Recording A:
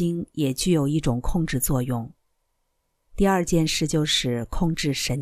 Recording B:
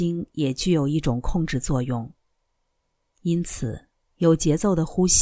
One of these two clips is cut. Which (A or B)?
A